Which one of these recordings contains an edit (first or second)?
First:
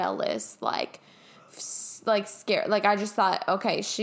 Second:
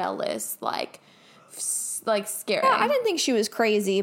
second